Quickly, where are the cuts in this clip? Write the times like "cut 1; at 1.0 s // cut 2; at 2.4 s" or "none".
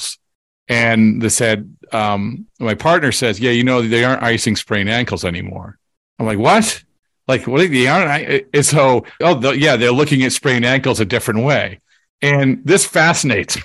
cut 1; at 9.2 s